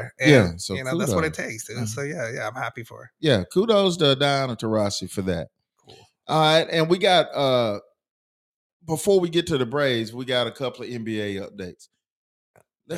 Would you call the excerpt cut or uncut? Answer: uncut